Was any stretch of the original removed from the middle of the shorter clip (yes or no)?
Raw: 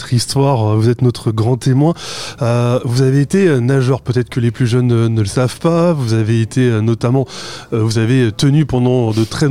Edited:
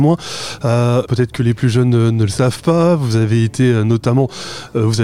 yes